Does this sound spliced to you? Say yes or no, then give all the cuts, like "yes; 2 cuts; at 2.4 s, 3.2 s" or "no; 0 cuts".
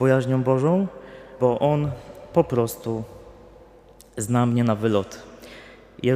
yes; 1 cut; at 1.4 s